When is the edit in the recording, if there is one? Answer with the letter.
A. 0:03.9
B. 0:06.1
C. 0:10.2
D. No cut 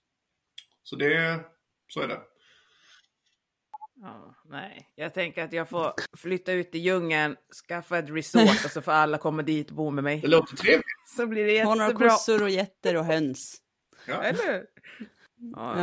B